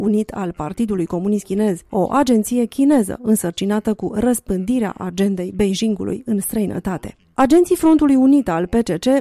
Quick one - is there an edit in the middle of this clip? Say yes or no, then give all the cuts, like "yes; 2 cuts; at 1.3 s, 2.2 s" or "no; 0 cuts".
yes; 1 cut; at 1.9 s